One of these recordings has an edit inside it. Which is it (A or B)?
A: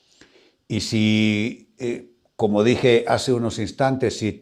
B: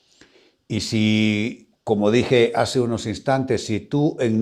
B